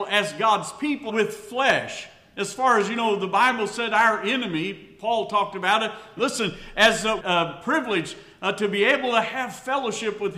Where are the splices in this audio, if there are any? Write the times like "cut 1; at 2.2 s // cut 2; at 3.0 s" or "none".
cut 1; at 1.1 s // cut 2; at 6.2 s // cut 3; at 7.2 s